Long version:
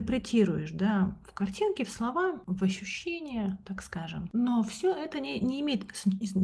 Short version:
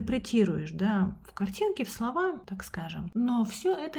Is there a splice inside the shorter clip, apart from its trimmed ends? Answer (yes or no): yes